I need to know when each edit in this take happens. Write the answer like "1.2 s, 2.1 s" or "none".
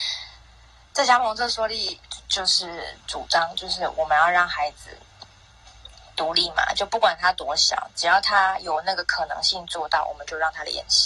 2.2 s